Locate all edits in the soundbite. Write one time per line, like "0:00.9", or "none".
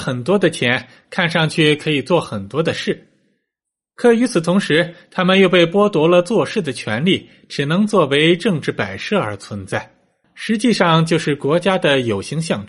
0:10.2